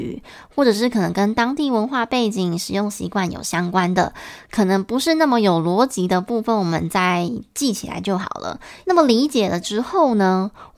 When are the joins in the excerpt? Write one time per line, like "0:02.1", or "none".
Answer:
0:08.8